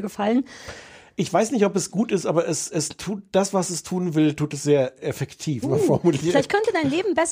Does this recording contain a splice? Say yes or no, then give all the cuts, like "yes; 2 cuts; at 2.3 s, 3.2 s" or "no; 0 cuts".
yes; 1 cut; at 5.6 s